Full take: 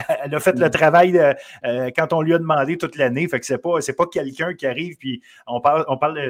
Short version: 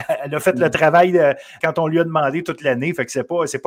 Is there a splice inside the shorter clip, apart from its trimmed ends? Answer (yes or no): yes